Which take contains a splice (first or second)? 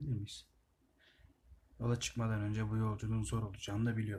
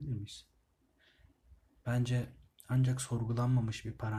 first